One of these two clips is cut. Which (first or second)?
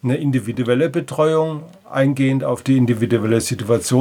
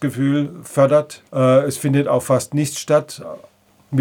second